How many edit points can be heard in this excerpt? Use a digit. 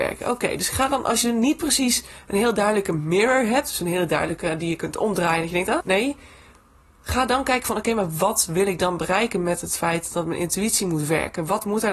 1